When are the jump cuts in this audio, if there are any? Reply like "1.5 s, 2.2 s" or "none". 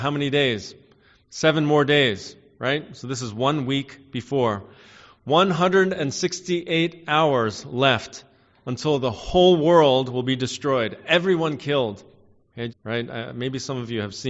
12.7 s

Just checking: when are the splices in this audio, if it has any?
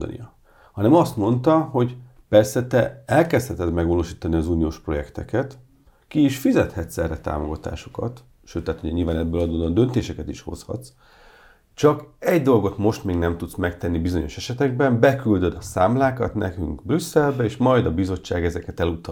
none

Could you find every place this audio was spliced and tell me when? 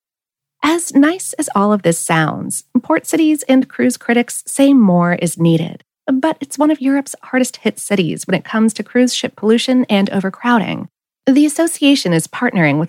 6.0 s, 11.1 s

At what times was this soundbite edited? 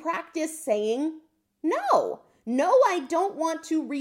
none

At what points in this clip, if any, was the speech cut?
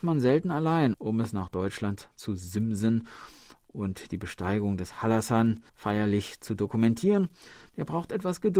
0.9 s, 5.7 s

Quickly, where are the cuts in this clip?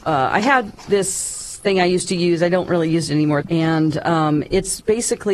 3.4 s

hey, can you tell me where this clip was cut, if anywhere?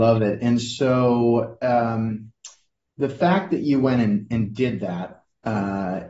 none

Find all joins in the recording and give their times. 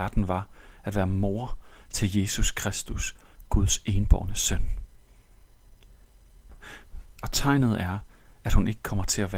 7.2 s

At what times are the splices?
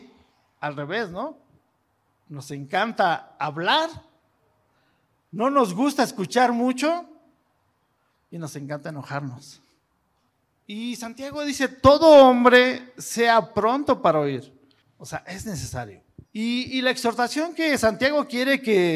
14.8 s, 16.3 s

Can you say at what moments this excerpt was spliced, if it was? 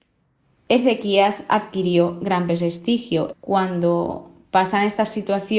3.3 s

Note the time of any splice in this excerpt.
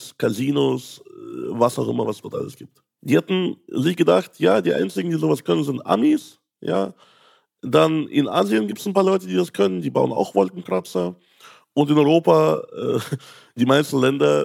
3.0 s

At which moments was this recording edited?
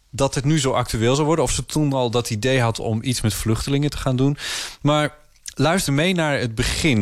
5.9 s

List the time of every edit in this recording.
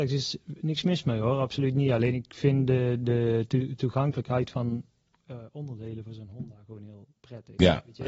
none

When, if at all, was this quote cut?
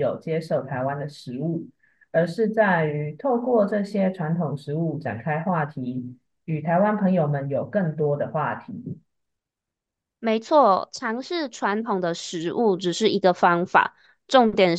none

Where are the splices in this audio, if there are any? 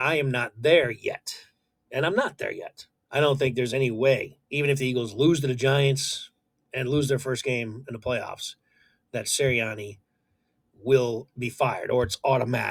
3.1 s, 4.4 s

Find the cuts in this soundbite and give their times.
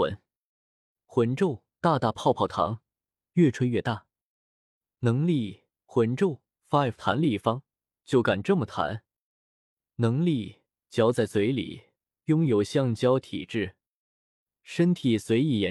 5.8 s

